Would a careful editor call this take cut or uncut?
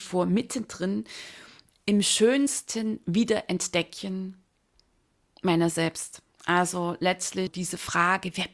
cut